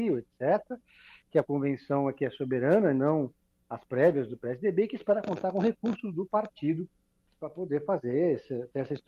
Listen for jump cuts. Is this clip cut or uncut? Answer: uncut